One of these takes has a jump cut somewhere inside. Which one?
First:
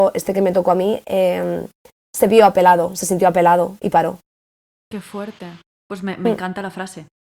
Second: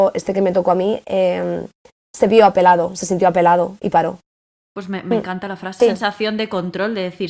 second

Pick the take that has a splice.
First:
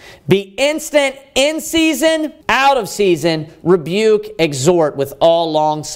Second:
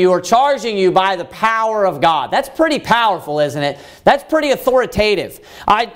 first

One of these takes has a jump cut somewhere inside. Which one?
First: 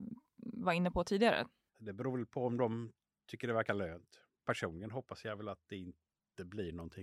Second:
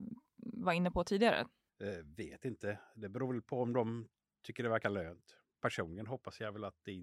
first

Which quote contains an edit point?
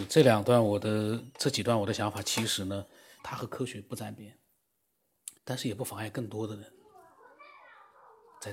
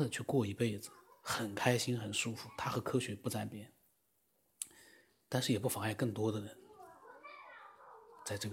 first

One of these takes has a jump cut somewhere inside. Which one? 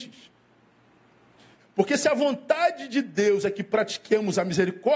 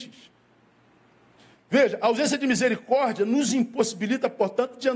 first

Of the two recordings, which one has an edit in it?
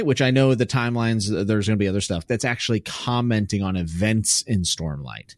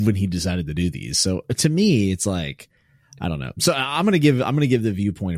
first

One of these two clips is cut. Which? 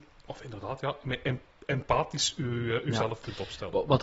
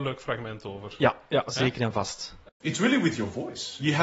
second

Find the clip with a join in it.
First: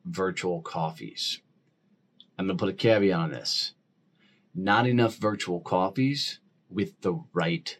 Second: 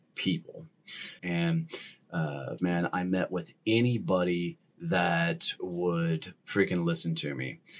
second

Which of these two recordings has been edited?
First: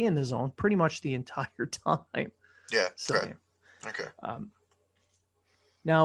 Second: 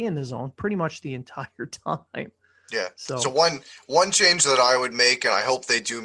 first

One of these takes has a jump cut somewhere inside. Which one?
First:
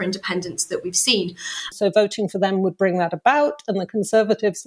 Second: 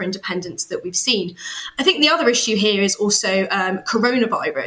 first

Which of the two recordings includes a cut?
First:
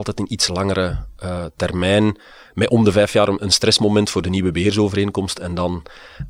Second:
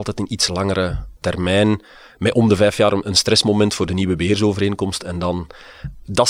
second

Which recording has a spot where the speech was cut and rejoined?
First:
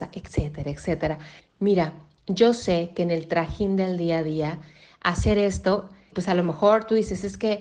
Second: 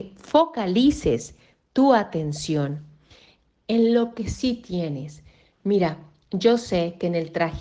first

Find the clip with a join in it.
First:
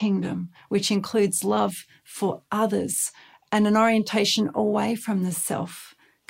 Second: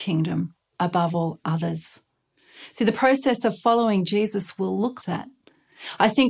second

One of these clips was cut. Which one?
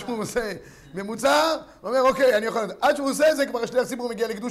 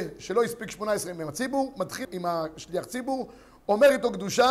second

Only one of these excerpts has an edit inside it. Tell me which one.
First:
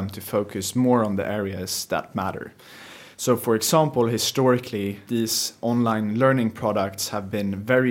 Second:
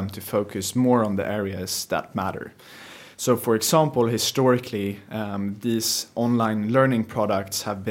first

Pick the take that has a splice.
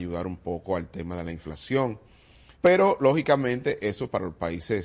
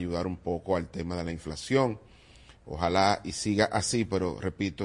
first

